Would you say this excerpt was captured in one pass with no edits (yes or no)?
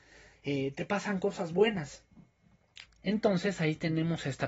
no